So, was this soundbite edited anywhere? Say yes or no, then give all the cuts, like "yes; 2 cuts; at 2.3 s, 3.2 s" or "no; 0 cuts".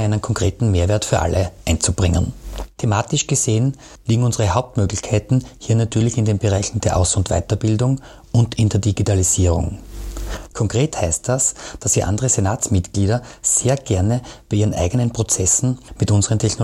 yes; 1 cut; at 10.5 s